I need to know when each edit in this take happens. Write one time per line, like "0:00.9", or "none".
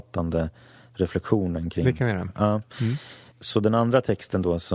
0:03.3